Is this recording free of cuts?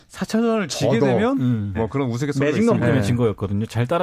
no; 2 cuts; at 1.7 s, 2.8 s

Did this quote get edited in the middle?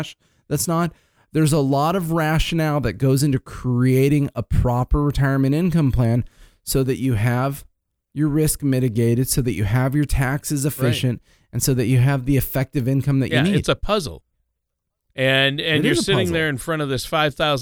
no; 0 cuts

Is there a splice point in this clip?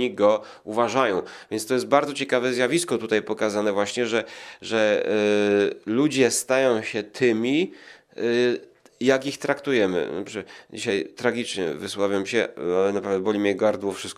no; 0 cuts

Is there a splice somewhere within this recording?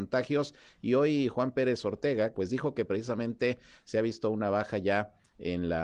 yes; 1 cut; at 2.3 s

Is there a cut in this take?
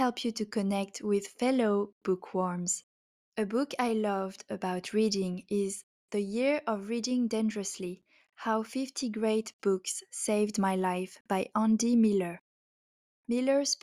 yes; 1 cut; at 3.3 s

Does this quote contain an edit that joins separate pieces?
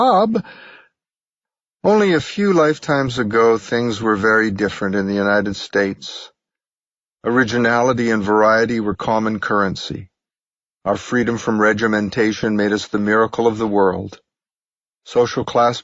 no; 0 cuts

